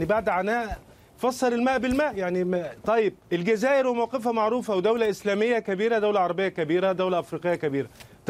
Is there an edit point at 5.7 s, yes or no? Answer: no